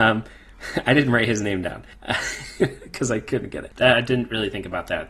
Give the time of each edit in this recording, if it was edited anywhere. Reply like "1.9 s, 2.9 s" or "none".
3.7 s